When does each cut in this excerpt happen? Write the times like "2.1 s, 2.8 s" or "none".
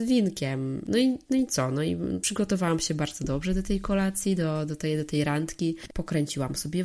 5.9 s